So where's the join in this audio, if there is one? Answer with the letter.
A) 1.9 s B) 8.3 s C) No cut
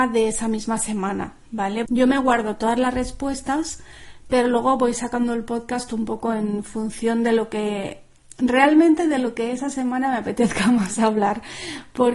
A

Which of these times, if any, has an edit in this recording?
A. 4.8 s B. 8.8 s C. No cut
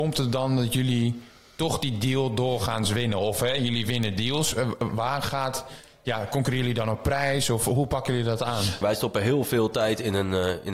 B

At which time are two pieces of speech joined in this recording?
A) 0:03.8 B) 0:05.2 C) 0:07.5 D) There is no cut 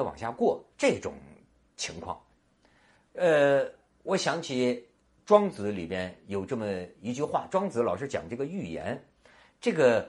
D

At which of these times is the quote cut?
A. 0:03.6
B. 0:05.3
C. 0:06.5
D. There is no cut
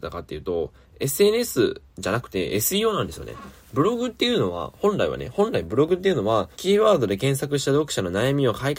C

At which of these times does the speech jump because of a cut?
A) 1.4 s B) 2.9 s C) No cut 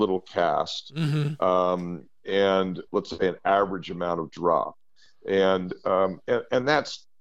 B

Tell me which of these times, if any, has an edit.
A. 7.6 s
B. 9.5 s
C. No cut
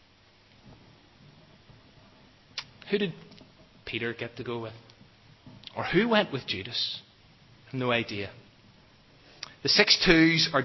A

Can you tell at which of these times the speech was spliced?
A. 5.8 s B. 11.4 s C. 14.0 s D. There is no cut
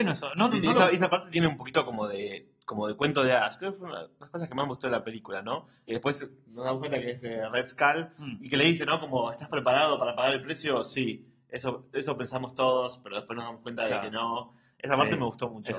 D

